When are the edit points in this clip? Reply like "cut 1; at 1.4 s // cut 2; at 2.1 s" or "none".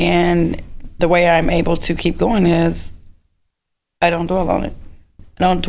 cut 1; at 1.0 s